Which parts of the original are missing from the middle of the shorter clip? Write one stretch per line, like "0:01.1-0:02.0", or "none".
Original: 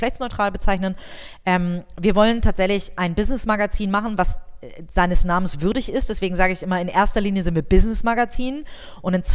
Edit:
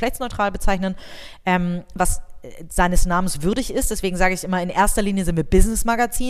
0:02.0-0:04.1